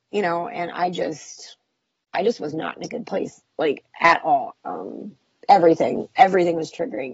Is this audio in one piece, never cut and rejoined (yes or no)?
no